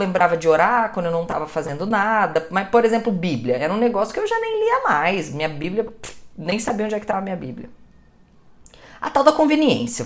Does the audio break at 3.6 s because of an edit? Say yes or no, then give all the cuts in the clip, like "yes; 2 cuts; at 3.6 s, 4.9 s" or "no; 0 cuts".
no; 0 cuts